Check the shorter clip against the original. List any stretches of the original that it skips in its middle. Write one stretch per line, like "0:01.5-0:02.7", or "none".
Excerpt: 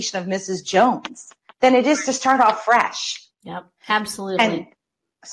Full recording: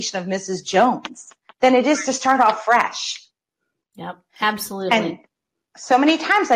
0:03.3-0:03.9